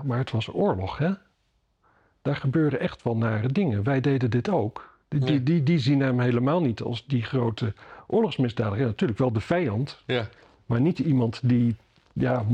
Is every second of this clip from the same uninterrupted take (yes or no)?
yes